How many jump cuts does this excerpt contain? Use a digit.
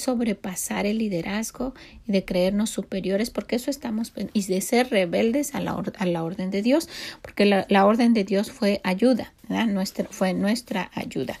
1